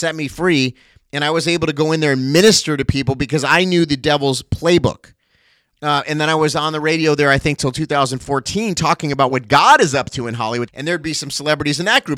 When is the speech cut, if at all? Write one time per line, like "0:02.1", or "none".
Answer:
0:05.7
0:10.7